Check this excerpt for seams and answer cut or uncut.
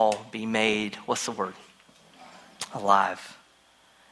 uncut